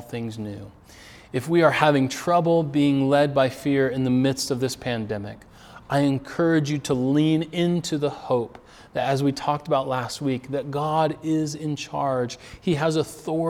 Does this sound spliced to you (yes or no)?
no